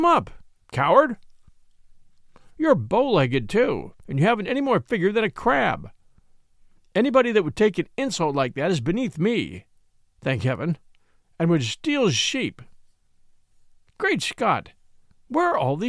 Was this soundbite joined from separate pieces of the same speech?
no; 0 cuts

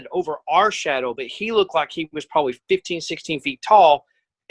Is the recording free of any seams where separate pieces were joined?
yes; 0 cuts

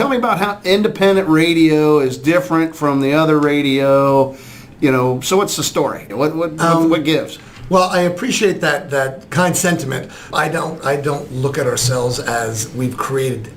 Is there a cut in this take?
yes; 2 cuts; at 6.1 s, 10.3 s

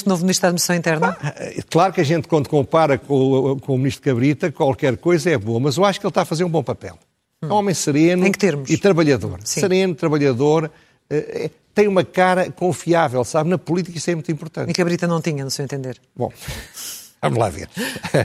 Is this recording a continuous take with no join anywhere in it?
yes; 0 cuts

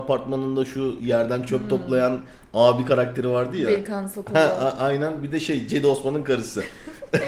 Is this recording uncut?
yes; 0 cuts

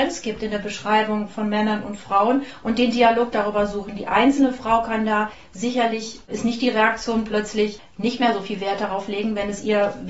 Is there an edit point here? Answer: no; 0 cuts

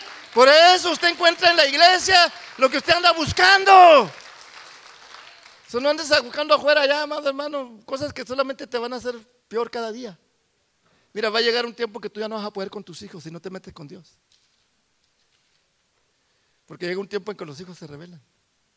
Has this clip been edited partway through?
no; 0 cuts

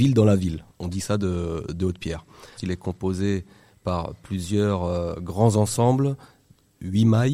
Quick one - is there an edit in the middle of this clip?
yes; 1 cut; at 2.6 s

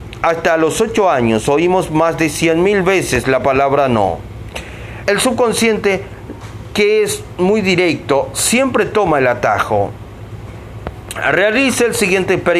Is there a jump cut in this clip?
yes; 1 cut; at 5.0 s

